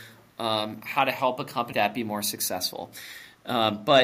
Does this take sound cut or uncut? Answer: cut